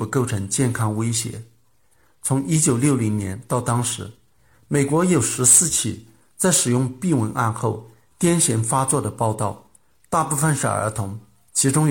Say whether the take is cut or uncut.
uncut